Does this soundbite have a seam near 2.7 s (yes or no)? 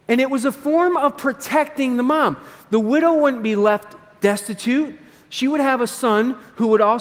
no